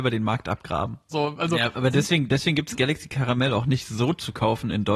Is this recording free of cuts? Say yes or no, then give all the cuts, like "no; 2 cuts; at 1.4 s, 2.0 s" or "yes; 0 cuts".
no; 1 cut; at 1.1 s